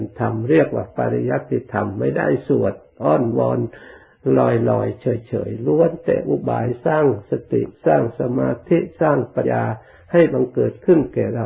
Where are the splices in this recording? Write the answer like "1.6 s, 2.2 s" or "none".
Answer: 9.4 s